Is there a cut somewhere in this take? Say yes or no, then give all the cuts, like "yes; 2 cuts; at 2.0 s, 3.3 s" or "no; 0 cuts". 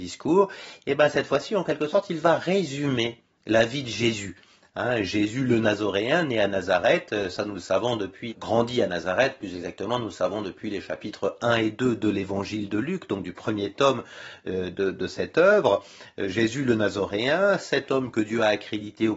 yes; 1 cut; at 8.3 s